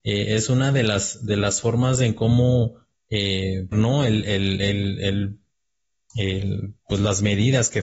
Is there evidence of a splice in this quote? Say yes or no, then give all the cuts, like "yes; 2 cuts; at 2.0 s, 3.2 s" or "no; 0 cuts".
yes; 1 cut; at 3.7 s